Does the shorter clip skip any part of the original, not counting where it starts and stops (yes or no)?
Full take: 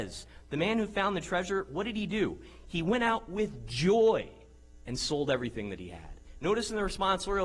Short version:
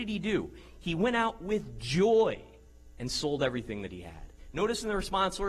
no